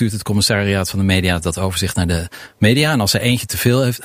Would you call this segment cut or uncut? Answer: uncut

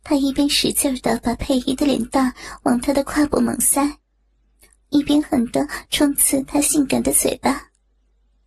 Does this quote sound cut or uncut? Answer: cut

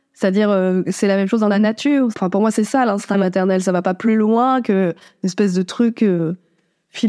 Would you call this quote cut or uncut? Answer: cut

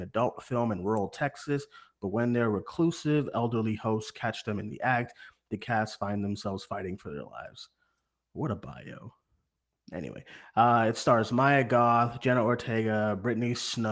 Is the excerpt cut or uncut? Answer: uncut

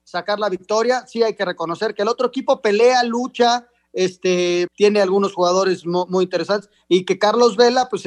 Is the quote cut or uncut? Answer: cut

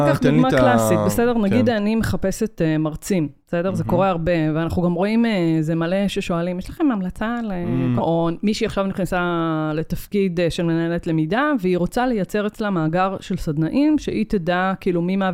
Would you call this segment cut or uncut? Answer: cut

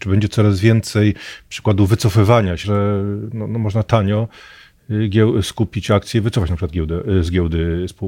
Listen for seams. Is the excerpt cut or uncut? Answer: cut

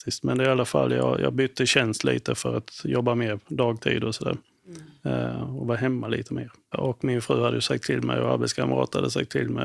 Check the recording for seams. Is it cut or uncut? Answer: cut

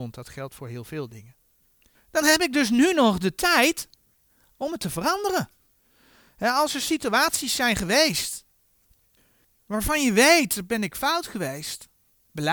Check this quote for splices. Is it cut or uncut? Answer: cut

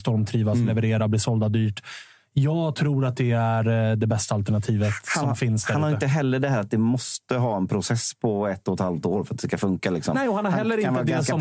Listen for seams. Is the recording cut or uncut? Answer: uncut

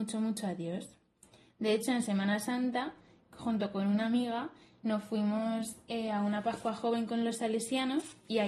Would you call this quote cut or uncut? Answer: uncut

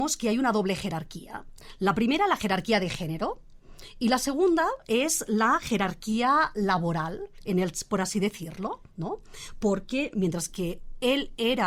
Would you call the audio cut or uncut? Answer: uncut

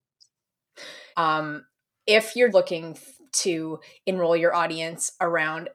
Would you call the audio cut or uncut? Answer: cut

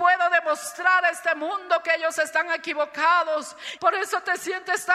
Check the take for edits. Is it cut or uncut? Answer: cut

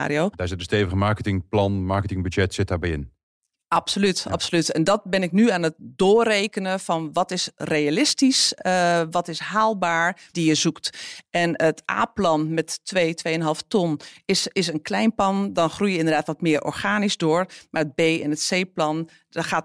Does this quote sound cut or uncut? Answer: cut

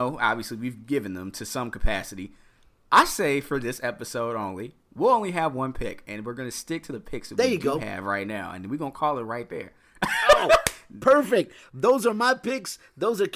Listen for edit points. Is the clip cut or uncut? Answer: uncut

